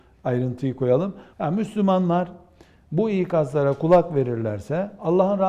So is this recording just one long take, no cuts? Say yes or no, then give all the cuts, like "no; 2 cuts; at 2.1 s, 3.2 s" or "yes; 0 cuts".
no; 1 cut; at 1.3 s